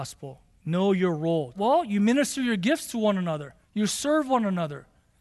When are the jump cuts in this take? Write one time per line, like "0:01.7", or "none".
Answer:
0:01.5
0:03.6

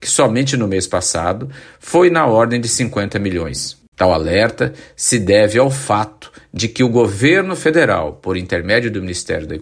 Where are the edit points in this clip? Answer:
0:03.9

